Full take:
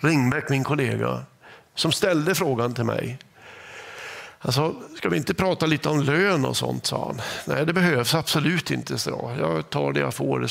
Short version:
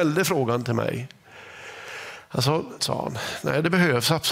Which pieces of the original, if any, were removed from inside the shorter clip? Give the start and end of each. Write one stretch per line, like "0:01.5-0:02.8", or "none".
0:04.9-0:06.8